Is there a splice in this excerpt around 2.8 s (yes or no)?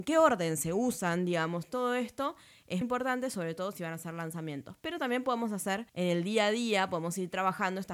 yes